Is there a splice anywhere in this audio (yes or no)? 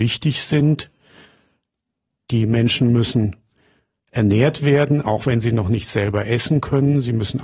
no